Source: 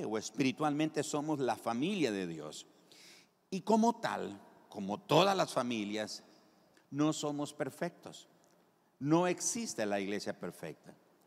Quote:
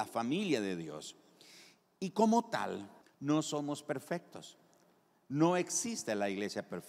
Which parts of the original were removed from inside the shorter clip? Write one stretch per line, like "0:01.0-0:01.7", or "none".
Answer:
0:04.5-0:06.7